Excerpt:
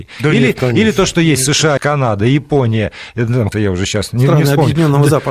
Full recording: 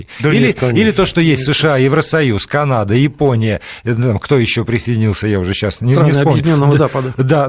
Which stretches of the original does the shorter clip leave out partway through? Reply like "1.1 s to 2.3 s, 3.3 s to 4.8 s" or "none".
1.8 s to 2.5 s, 4.2 s to 5.2 s